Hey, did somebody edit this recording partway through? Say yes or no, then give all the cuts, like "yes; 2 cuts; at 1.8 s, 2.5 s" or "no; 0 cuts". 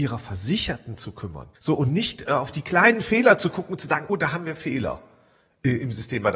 yes; 2 cuts; at 1.5 s, 4.1 s